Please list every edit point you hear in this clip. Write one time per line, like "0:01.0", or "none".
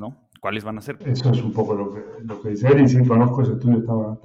0:01.0